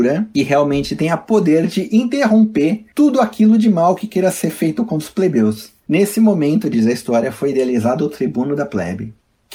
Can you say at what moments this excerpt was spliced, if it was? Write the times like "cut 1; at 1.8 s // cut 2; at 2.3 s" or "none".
none